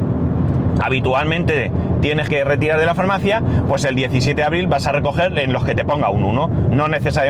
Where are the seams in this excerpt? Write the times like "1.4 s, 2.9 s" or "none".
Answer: 2.3 s